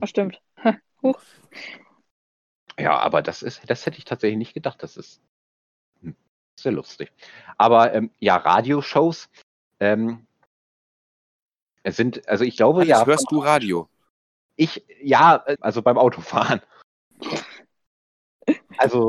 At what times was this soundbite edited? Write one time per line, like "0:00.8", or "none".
0:15.6